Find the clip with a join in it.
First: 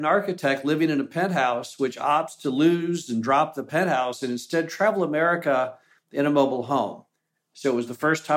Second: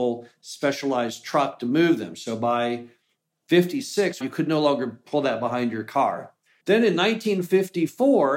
second; 2 cuts; at 4.2 s, 6.6 s

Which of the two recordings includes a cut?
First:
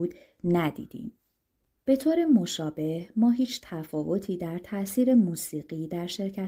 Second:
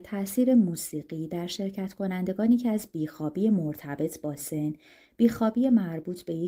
first; 1 cut; at 1.8 s

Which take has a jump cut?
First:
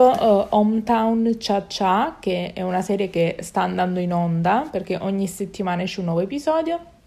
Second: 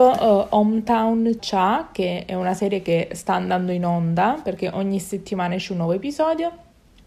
second; 1 cut; at 1.4 s

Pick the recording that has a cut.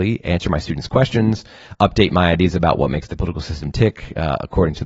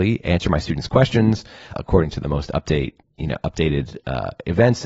second; 1 cut; at 1.7 s

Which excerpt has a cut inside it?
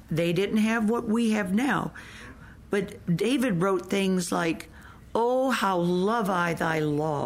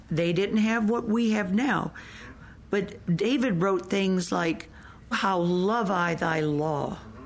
second; 1 cut; at 5.1 s

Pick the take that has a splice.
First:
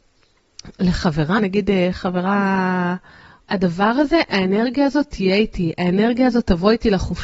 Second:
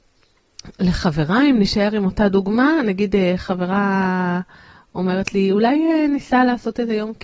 first; 2 cuts; at 1.4 s, 3.4 s

